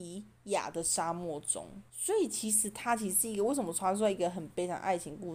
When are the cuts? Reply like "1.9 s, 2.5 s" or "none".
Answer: 1.9 s